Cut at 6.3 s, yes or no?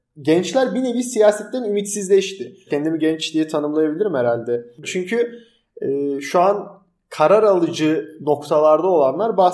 no